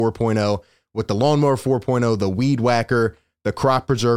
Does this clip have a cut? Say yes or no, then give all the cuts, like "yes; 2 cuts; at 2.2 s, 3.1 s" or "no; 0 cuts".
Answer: no; 0 cuts